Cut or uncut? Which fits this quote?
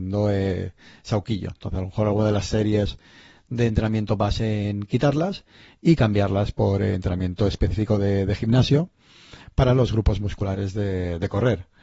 uncut